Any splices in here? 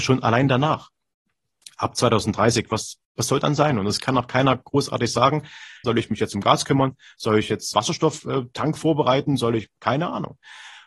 yes; 3 cuts; at 3.0 s, 5.8 s, 7.7 s

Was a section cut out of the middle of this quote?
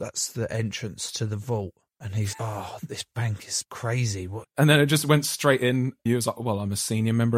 yes; 3 cuts; at 2.3 s, 4.4 s, 6.1 s

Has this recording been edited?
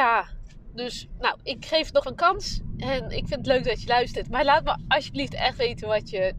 yes; 1 cut; at 2.0 s

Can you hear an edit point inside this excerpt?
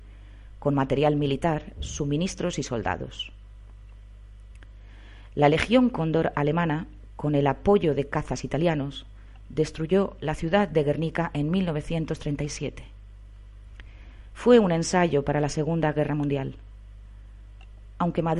no; 0 cuts

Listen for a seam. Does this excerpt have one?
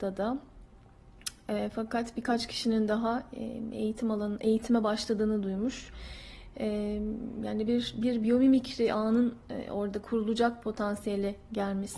no; 0 cuts

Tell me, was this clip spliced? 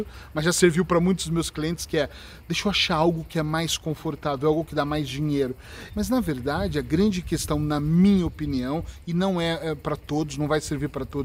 yes; 1 cut; at 5.9 s

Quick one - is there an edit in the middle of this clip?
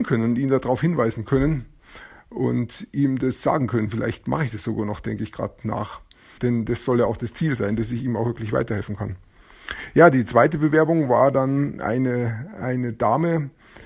yes; 1 cut; at 6.4 s

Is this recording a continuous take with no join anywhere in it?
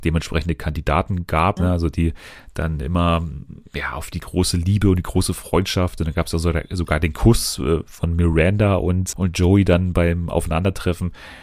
no; 2 cuts; at 1.6 s, 9.1 s

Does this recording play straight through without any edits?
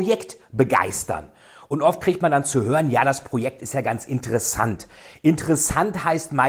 yes; 0 cuts

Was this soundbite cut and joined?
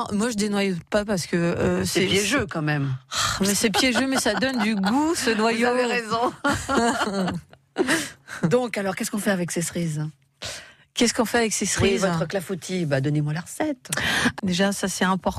yes; 1 cut; at 14.4 s

